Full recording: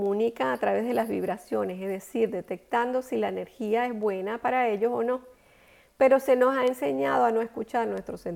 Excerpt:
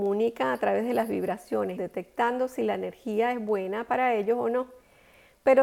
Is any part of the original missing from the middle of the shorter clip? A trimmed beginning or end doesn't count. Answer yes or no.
yes